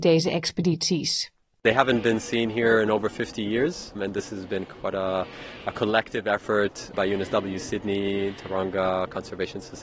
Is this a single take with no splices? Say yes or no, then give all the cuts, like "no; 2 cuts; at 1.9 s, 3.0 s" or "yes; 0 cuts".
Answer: no; 2 cuts; at 4.0 s, 6.9 s